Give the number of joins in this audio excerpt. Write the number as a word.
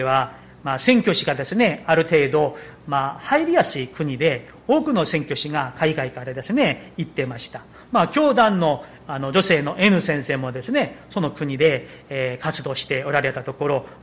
zero